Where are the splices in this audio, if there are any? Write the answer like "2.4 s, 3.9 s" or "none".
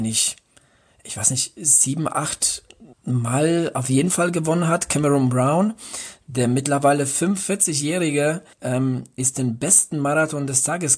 2.9 s, 8.5 s